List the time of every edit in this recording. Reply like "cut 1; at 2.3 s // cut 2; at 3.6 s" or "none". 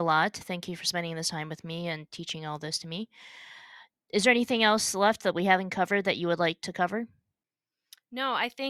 none